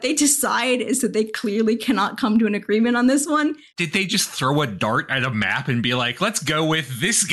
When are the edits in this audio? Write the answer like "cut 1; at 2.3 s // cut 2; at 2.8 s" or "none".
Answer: cut 1; at 3.7 s